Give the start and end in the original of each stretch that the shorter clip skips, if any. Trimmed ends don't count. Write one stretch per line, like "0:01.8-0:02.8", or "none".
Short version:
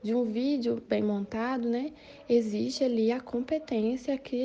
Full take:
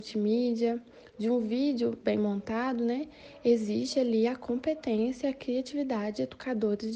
none